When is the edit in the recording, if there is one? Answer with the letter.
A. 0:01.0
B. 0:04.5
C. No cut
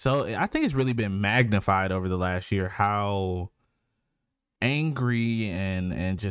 C